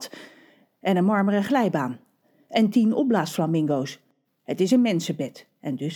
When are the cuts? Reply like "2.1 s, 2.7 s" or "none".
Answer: 4.2 s